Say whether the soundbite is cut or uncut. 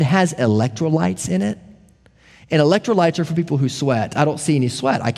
uncut